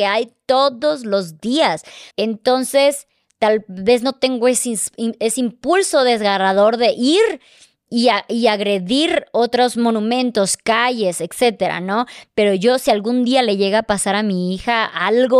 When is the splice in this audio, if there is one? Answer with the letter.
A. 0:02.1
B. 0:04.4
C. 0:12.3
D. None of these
A